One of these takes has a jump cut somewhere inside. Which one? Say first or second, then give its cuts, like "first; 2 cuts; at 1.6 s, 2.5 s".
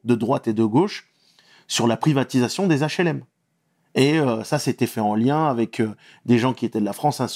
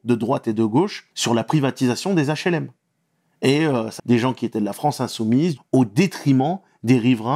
second; 3 cuts; at 1.1 s, 4.0 s, 5.6 s